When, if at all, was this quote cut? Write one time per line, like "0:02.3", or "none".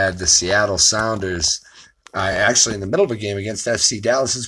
none